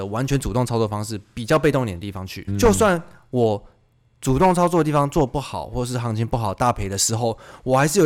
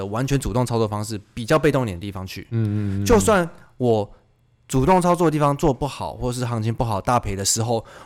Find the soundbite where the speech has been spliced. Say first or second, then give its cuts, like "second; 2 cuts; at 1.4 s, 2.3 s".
first; 1 cut; at 2.5 s